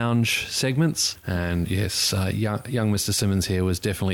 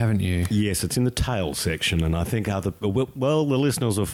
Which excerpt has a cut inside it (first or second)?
first